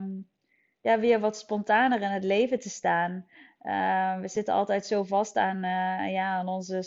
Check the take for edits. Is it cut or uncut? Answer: uncut